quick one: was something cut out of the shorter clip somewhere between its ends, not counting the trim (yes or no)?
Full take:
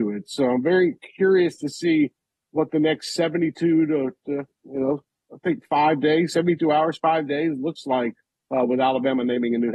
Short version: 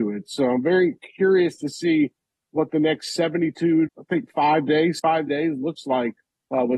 yes